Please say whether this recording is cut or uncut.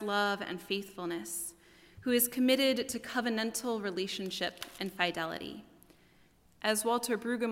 cut